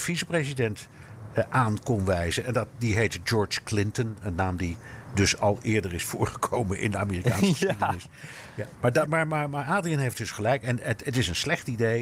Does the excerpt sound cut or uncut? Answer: cut